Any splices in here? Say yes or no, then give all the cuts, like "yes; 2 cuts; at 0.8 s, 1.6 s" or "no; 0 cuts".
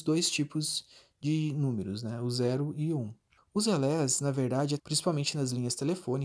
yes; 2 cuts; at 3.4 s, 4.8 s